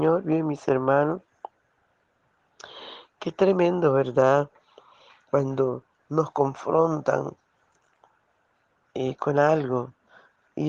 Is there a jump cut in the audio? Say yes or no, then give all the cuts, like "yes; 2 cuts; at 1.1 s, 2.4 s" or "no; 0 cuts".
no; 0 cuts